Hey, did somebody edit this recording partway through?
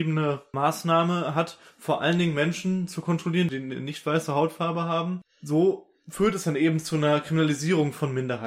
no; 0 cuts

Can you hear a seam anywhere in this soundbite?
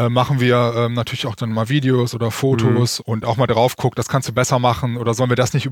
yes; 1 cut; at 3.0 s

